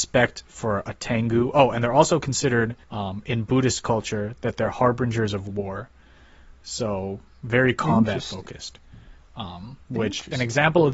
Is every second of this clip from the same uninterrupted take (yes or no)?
no